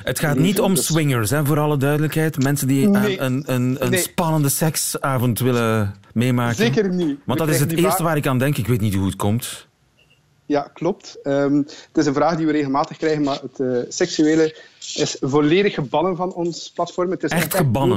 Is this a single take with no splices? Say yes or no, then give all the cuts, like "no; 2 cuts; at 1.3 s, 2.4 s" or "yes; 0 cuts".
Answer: yes; 0 cuts